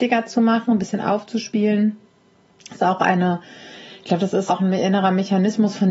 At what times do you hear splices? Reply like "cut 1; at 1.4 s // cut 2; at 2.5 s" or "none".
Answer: cut 1; at 4.5 s